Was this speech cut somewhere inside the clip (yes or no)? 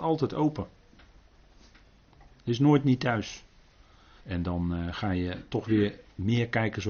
yes